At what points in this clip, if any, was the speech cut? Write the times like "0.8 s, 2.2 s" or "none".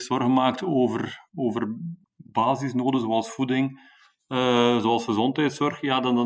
none

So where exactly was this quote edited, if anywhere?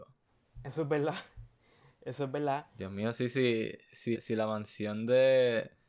4.1 s

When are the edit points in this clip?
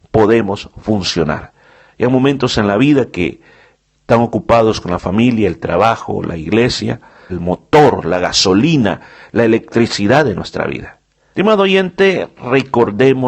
7.3 s, 11.3 s

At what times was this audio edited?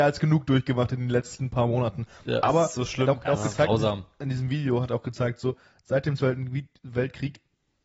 3.2 s

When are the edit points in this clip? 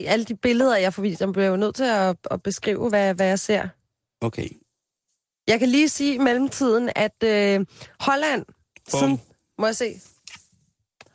none

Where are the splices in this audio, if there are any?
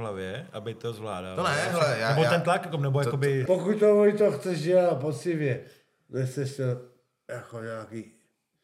3.5 s

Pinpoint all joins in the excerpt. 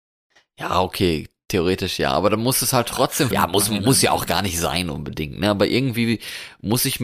3.3 s

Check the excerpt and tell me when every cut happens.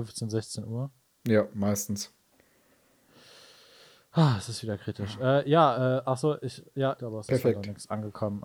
7.0 s

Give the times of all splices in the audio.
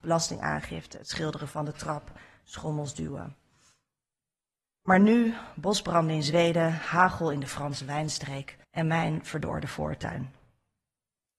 4.6 s, 8.6 s

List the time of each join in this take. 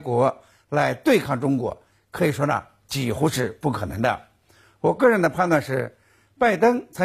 none

